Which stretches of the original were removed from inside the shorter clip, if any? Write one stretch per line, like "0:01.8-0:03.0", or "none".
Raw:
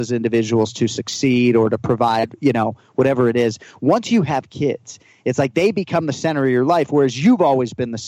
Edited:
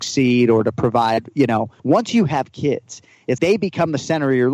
0:02.9-0:03.8
0:05.4-0:05.5